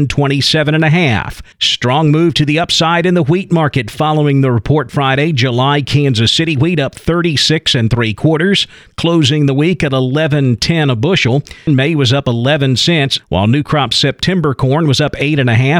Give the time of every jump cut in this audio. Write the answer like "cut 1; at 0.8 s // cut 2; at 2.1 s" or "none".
cut 1; at 1.5 s // cut 2; at 11.7 s // cut 3; at 13.2 s